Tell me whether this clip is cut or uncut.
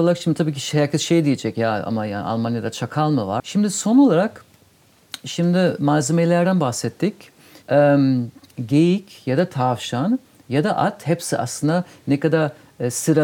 cut